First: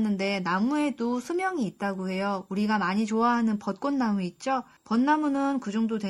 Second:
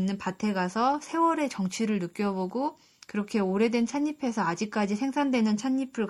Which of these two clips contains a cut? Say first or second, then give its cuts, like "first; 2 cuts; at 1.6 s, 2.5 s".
first; 1 cut; at 4.8 s